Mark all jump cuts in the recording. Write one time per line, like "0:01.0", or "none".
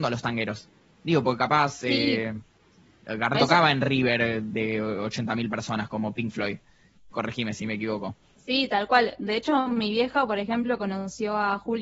0:03.3
0:07.1